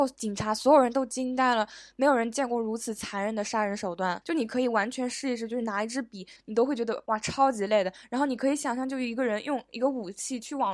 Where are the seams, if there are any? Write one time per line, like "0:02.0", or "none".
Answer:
0:04.2
0:06.4

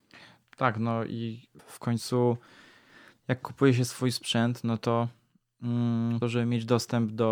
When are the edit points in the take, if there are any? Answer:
0:01.6
0:06.2

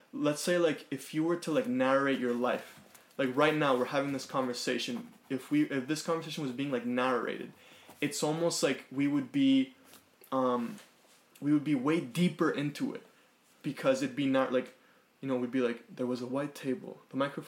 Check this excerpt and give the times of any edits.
none

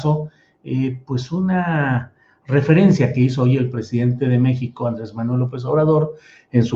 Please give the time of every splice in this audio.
none

